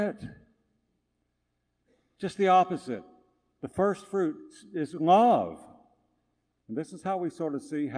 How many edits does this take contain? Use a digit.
1